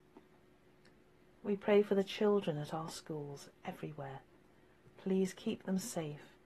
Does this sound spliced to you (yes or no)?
no